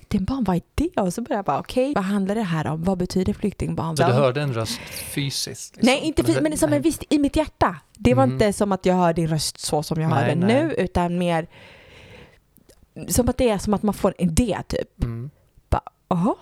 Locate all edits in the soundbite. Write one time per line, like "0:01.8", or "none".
0:01.9
0:04.0